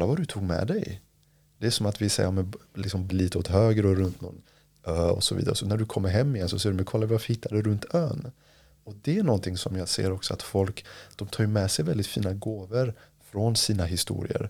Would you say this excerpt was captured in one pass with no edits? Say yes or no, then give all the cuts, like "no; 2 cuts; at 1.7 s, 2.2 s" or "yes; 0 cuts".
no; 1 cut; at 3.1 s